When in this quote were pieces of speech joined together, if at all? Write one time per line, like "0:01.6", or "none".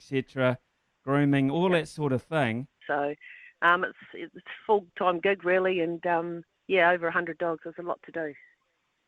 0:02.8